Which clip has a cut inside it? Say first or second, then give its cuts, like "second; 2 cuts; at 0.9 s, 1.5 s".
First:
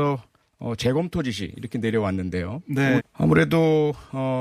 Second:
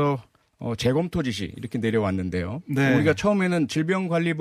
first; 1 cut; at 3.0 s